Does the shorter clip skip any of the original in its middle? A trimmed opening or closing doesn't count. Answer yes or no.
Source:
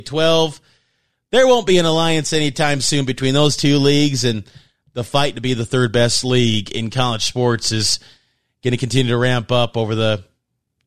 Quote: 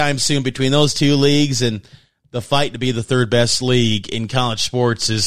no